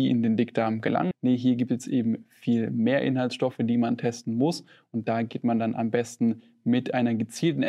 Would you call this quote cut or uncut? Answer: cut